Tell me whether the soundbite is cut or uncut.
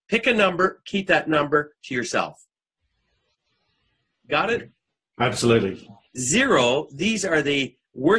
cut